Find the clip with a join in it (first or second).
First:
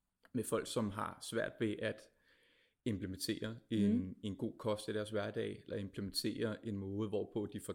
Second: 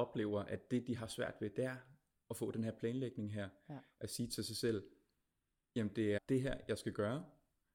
second